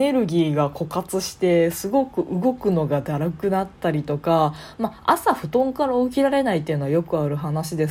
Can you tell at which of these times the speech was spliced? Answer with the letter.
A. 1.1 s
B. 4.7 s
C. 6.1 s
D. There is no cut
D